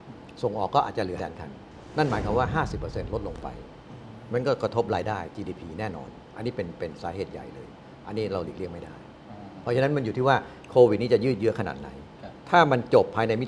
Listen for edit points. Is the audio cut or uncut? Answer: cut